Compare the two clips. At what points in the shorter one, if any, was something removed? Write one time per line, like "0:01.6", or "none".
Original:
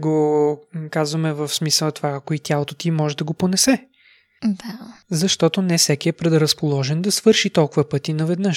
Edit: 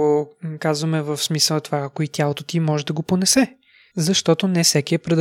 0:03.9

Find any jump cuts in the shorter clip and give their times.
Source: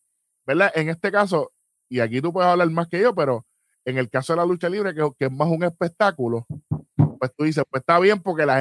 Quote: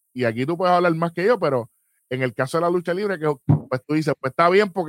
0:03.4

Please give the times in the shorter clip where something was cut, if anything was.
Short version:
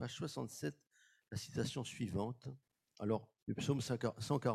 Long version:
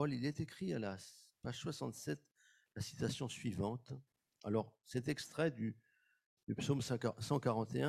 0:03.4

